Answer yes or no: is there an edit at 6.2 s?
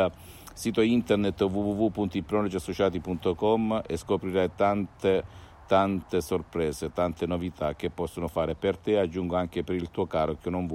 no